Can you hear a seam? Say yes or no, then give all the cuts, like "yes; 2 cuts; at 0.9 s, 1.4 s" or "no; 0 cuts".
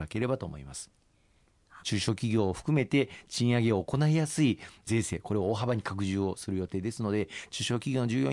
yes; 1 cut; at 1.8 s